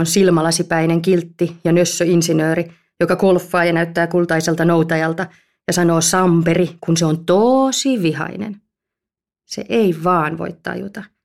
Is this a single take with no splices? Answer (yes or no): yes